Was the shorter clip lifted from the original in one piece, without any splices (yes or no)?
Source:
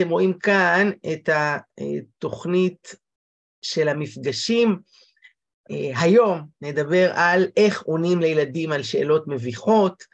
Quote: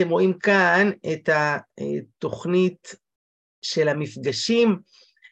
yes